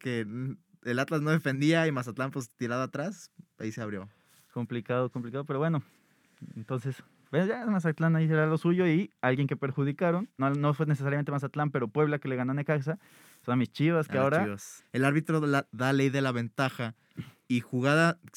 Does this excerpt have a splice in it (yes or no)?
yes